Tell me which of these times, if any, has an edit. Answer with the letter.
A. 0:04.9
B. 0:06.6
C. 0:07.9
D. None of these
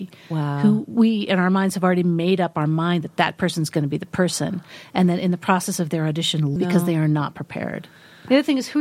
B